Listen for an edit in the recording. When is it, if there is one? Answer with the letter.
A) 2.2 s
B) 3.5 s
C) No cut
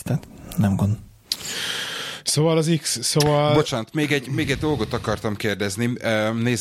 C